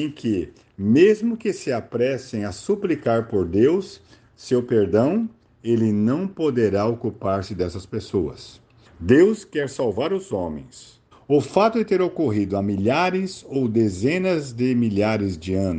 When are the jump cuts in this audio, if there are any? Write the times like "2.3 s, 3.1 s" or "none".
8.9 s, 11.1 s